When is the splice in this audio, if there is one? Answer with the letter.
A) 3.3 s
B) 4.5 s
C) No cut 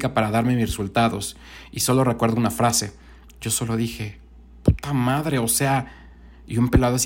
A